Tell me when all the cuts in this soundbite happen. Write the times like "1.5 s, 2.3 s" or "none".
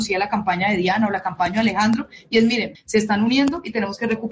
2.7 s